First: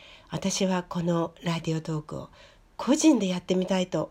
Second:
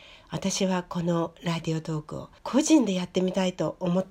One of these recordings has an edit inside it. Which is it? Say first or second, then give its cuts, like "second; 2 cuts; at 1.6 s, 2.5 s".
second; 1 cut; at 2.4 s